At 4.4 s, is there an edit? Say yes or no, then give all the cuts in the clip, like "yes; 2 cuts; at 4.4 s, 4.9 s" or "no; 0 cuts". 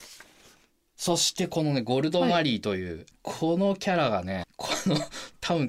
yes; 2 cuts; at 3.1 s, 4.4 s